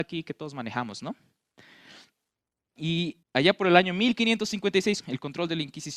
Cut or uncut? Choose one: cut